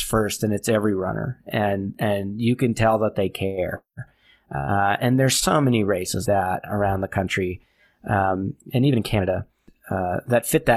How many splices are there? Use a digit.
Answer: 1